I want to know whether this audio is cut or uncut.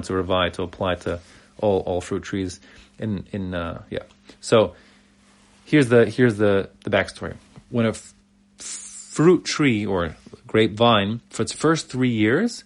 cut